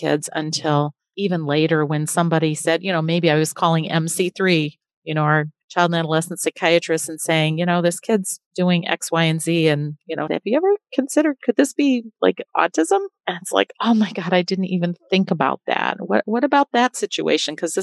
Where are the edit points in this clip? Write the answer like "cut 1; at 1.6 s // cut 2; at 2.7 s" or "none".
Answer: cut 1; at 10.3 s